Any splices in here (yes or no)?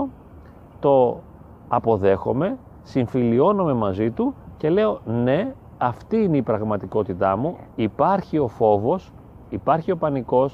yes